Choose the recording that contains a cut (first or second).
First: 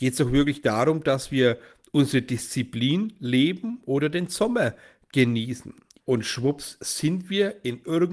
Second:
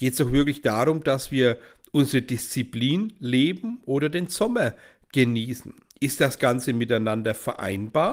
first